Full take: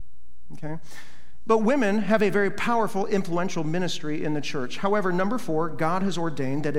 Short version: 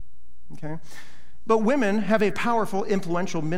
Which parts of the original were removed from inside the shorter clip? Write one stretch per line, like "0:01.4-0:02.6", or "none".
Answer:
0:02.3-0:02.5

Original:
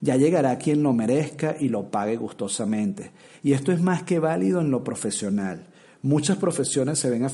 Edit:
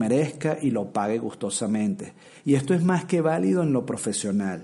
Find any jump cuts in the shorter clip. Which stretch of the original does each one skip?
none

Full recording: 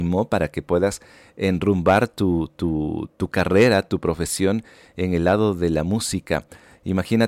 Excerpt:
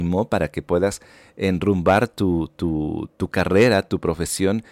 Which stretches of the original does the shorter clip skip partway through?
none

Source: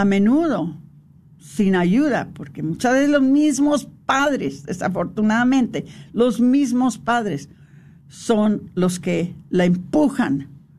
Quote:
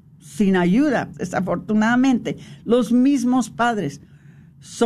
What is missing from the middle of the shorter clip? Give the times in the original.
0:02.3-0:04.6

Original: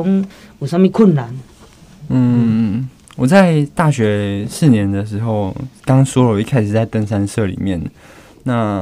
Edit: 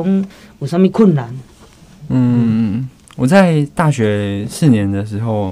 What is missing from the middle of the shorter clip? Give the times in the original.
none

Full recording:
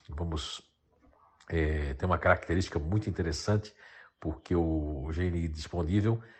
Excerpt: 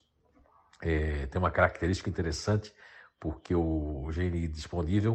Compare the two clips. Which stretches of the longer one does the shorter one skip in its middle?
0:02.7-0:03.0

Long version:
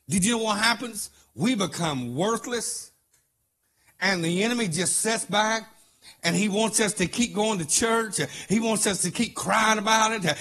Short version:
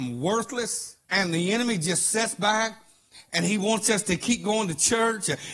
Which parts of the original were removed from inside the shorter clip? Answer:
0:03.0-0:04.0

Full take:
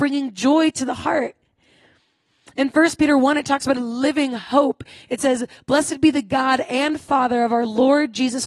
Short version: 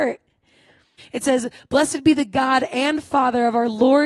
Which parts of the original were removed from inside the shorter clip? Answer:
0:02.1-0:05.0

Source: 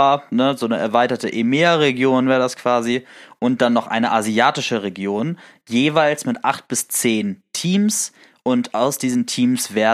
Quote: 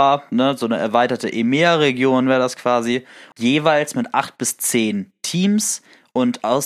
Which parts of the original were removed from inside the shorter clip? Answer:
0:03.3-0:05.6

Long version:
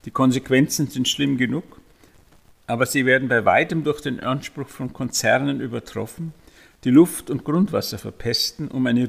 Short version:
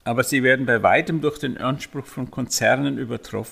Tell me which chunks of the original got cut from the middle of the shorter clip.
none

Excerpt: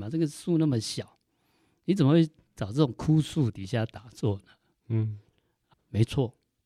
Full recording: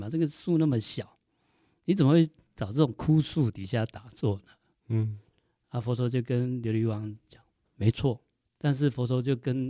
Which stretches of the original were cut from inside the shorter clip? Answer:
0:05.7-0:07.6

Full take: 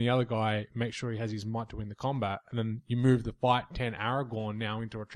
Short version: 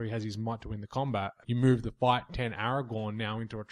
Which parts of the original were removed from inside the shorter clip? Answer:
0:02.5-0:02.8

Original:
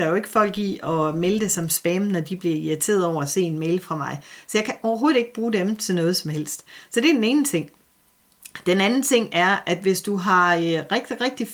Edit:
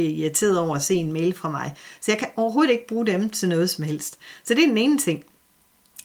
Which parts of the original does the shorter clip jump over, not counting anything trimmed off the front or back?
none

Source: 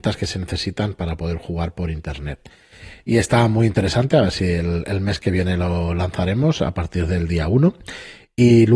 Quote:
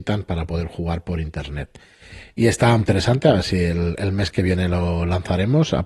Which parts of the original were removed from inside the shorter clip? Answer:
0:03.5-0:03.7

